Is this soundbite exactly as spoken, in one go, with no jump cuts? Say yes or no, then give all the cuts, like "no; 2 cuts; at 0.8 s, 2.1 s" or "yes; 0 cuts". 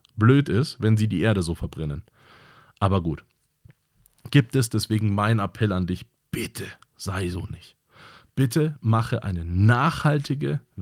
yes; 0 cuts